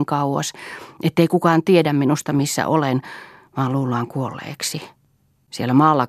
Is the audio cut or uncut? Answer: uncut